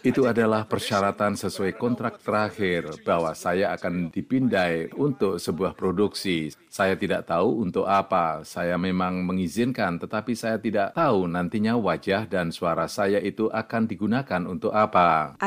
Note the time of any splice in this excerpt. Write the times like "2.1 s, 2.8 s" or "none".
none